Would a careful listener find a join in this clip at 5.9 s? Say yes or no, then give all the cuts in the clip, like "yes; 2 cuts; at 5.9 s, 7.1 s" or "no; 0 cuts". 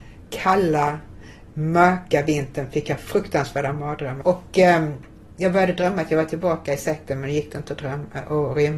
no; 1 cut; at 4.2 s